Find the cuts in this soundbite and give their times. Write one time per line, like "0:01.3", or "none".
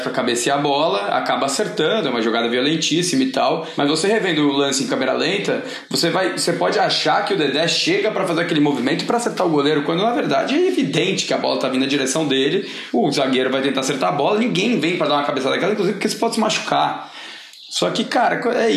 none